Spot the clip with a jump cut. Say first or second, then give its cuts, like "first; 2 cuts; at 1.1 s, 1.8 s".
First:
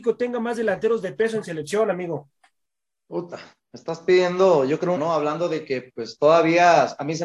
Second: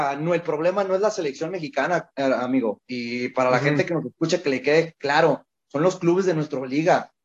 first; 1 cut; at 5.0 s